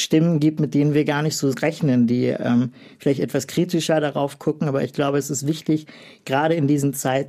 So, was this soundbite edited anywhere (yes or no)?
no